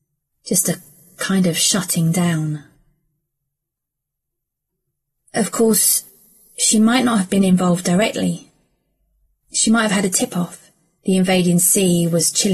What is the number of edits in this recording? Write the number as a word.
one